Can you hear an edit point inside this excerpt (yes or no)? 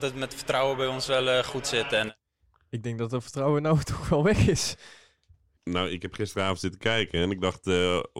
yes